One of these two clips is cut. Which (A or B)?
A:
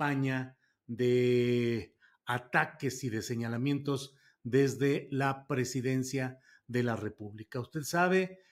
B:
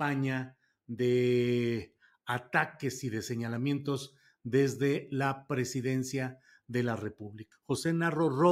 B